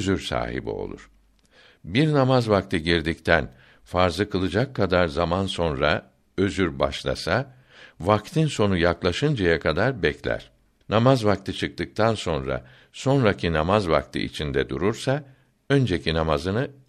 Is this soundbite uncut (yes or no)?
no